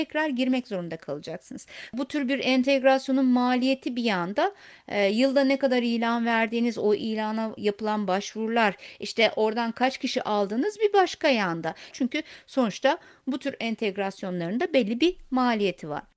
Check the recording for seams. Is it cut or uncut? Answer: cut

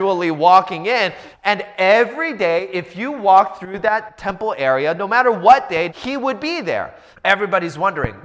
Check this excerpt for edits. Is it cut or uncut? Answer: cut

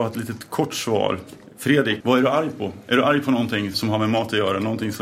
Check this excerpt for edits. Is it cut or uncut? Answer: cut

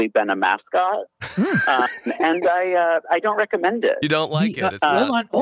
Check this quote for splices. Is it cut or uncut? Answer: uncut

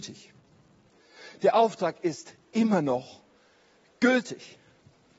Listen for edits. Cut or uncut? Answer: uncut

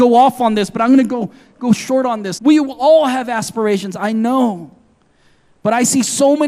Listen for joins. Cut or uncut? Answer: cut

